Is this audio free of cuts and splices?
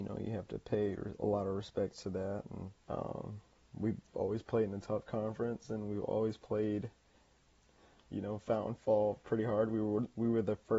no; 1 cut; at 2.8 s

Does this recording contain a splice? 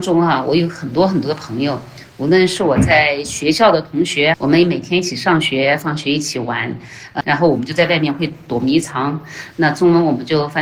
yes; 3 cuts; at 4.3 s, 7.2 s, 9.5 s

